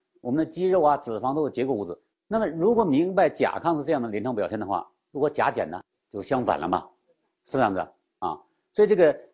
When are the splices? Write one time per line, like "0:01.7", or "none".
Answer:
0:02.1